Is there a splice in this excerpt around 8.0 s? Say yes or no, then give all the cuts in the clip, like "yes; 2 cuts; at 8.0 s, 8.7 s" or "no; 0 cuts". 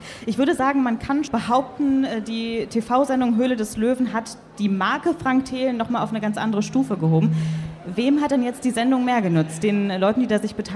no; 1 cut; at 1.3 s